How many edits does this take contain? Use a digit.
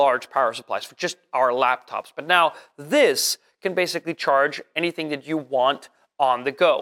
0